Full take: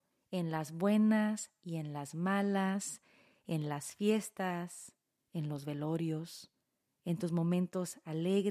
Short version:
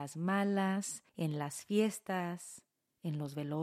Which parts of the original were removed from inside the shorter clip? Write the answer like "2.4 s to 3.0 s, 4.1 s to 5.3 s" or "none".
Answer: 3.1 s to 3.4 s